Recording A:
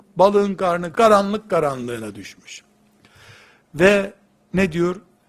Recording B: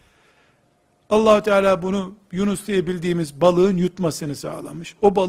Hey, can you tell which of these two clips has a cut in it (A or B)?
A